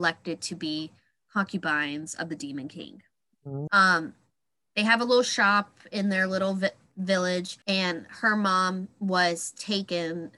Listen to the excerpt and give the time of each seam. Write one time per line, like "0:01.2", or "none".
0:03.7
0:07.6